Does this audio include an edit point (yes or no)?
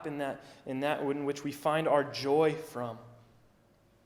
no